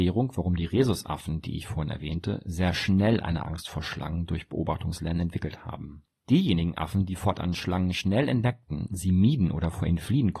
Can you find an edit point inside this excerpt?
yes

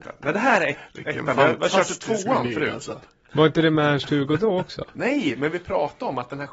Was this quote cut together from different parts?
no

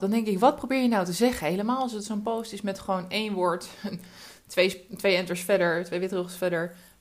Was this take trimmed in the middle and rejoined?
no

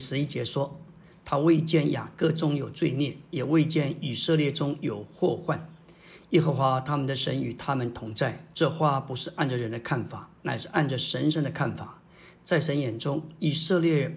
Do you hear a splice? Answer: no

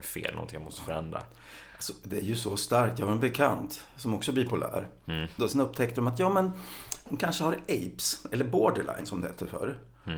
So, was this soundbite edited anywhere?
yes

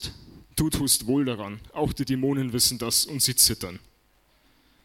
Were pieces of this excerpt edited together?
no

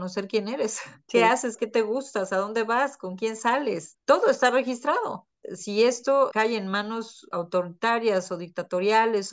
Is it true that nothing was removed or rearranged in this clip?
yes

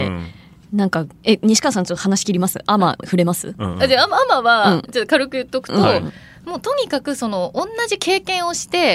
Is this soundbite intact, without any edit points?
no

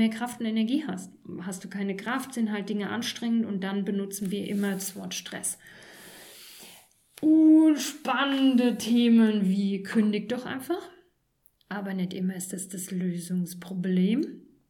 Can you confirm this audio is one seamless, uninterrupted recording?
yes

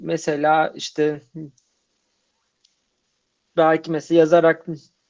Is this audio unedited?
yes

